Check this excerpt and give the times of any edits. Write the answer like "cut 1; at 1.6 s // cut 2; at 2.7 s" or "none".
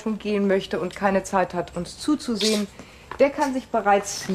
none

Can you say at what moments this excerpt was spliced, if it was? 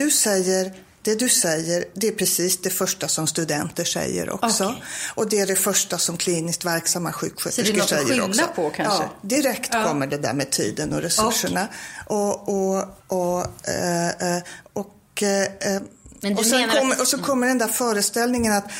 cut 1; at 13.0 s

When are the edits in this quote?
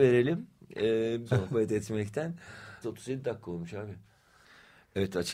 cut 1; at 1.3 s // cut 2; at 2.8 s

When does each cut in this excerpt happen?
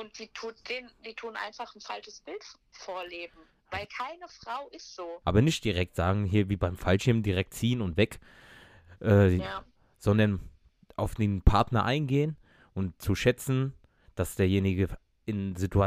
cut 1; at 5.2 s

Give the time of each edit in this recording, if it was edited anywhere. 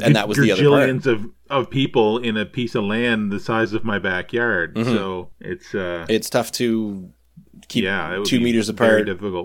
none

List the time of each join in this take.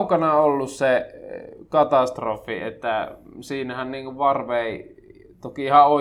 none

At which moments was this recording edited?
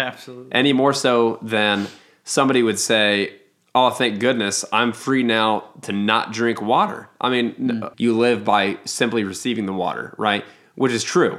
cut 1; at 7.9 s

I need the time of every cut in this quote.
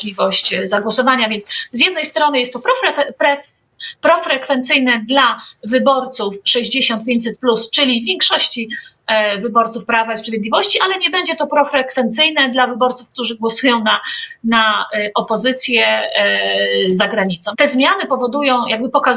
cut 1; at 17.5 s

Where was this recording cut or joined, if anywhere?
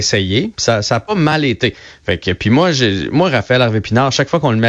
none

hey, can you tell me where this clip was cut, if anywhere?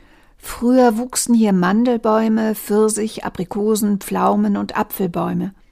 none

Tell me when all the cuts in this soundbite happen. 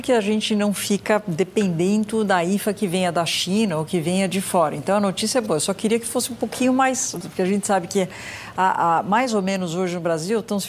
cut 1; at 7.2 s

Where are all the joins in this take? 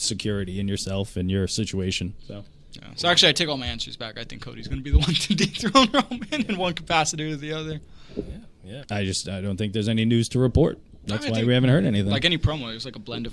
cut 1; at 8.8 s

